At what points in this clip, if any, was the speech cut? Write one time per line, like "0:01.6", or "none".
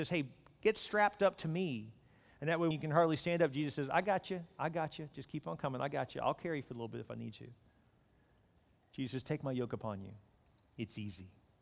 0:02.7